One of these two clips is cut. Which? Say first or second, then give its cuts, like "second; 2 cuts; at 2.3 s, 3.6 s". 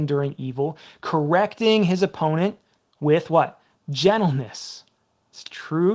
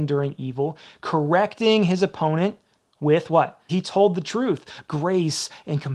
second; 2 cuts; at 3.7 s, 4.8 s